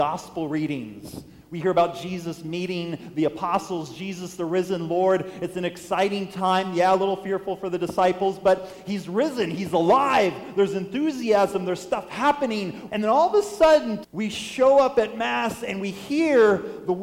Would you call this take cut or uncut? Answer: cut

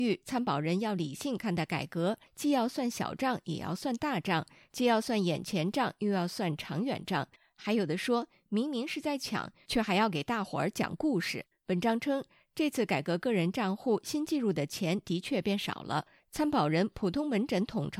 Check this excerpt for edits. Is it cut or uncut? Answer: cut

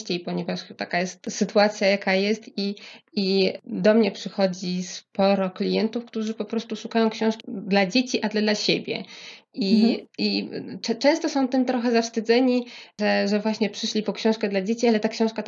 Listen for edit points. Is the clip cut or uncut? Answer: uncut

